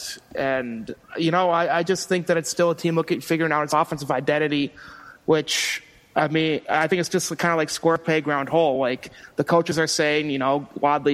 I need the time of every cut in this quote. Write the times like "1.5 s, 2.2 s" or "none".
none

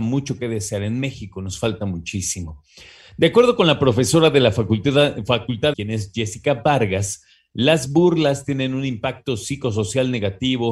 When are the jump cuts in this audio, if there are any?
5.7 s

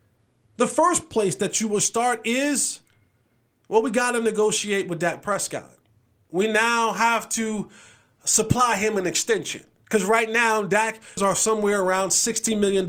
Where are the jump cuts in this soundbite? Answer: 11.2 s

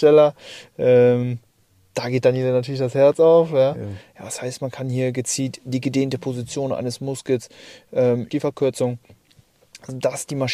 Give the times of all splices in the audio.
4.0 s, 8.3 s

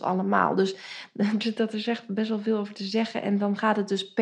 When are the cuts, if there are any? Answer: 1.4 s

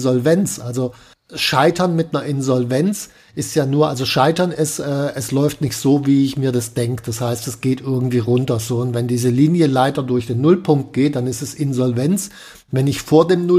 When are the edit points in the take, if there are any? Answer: none

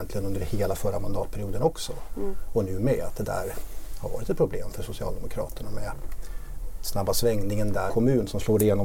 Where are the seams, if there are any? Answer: 7.9 s

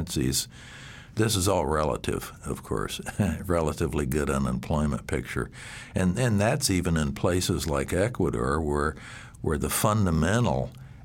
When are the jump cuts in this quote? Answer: 1.1 s

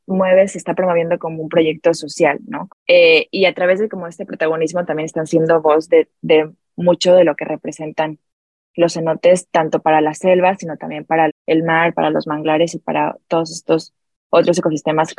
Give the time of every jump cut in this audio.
2.7 s, 11.3 s

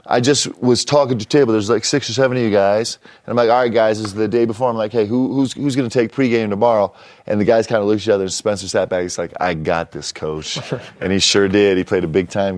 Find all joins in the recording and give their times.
none

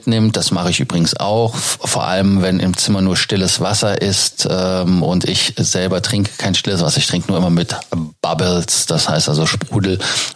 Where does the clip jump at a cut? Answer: none

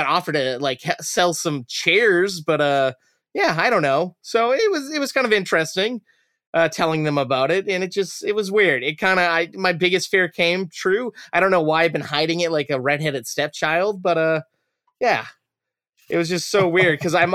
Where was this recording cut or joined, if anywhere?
none

